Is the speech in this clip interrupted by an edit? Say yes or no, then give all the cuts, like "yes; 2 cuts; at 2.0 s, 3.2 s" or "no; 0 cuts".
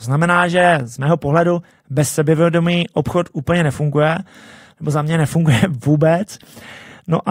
no; 0 cuts